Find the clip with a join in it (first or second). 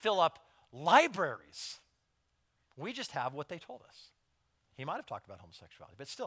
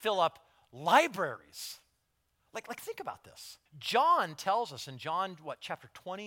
second